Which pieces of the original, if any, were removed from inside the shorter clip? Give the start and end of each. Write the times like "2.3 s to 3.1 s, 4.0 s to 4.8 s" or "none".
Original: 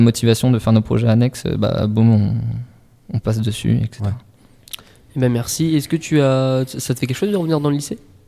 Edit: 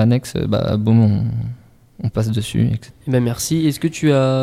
4.0 s to 5.0 s